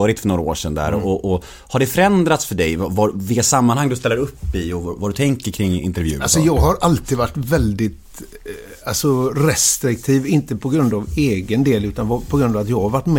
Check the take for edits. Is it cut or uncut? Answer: uncut